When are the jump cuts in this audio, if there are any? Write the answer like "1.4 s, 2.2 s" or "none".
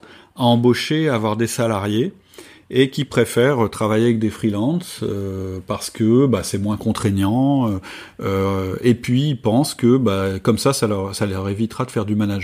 none